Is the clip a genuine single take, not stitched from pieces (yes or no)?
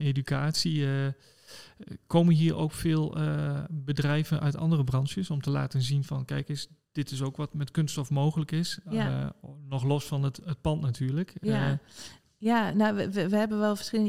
yes